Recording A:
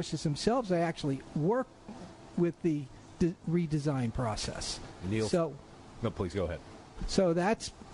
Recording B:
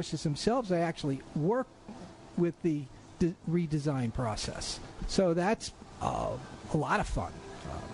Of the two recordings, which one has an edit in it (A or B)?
B